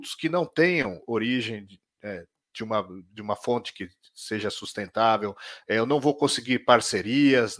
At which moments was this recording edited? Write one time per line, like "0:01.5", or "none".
none